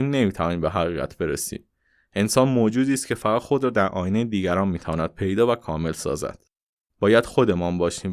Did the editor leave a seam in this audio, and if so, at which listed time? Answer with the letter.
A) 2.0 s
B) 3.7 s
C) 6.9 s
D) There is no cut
C